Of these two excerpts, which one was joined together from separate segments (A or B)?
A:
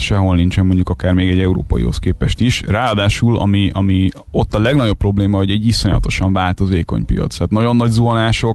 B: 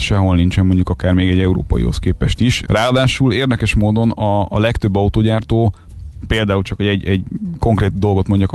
B